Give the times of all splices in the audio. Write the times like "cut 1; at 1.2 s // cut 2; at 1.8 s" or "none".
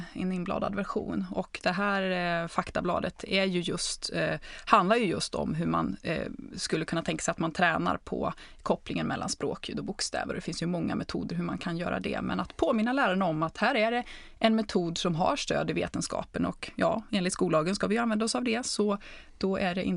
none